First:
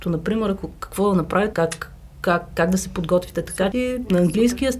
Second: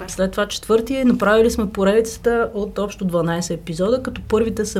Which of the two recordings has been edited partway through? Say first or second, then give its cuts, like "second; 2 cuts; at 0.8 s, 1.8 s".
first; 2 cuts; at 1.5 s, 3.7 s